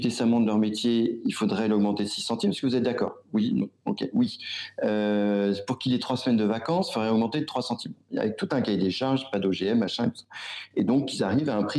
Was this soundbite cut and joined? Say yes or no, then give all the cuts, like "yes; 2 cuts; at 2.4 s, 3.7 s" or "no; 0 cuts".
no; 0 cuts